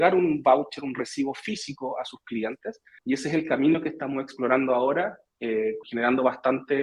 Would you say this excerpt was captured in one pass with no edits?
no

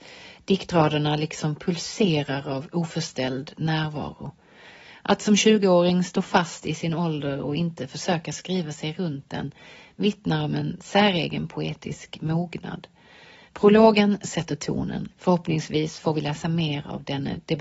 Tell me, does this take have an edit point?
yes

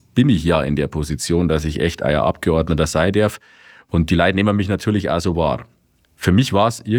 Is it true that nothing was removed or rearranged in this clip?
yes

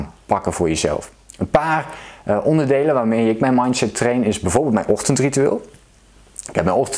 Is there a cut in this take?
no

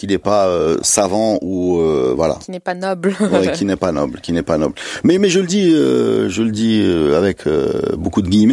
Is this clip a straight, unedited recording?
yes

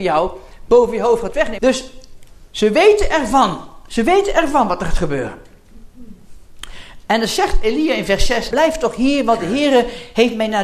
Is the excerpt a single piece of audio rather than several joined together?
no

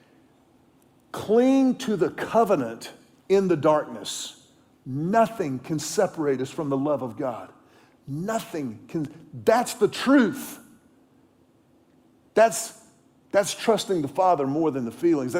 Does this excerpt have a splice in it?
yes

